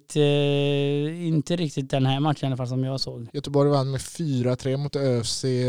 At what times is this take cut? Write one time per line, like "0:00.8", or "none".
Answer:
0:03.3